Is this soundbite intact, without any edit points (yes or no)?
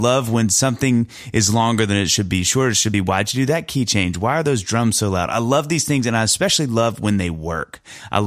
yes